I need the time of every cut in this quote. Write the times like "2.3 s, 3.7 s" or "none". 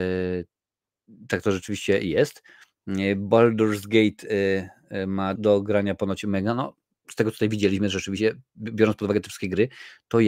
5.4 s